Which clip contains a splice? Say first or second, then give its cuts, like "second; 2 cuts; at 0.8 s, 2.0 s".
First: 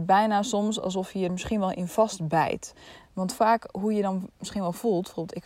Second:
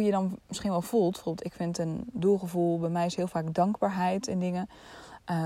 first; 2 cuts; at 1.3 s, 3.0 s